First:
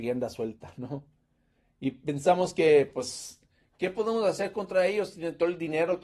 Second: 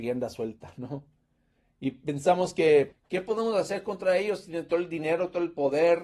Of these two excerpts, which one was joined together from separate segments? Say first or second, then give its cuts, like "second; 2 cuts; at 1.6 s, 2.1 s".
second; 1 cut; at 2.9 s